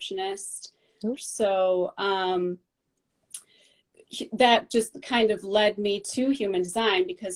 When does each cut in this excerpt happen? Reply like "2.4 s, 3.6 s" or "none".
1.1 s